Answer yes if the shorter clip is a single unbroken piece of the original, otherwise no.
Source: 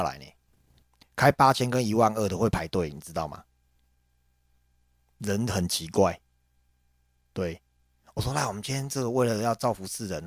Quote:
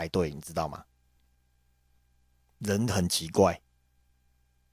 yes